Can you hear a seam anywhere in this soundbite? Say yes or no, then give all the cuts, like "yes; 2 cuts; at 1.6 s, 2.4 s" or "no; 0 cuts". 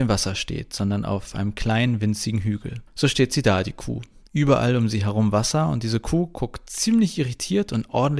yes; 1 cut; at 2.9 s